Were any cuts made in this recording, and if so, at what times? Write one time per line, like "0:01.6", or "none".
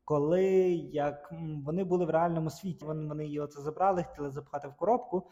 0:02.8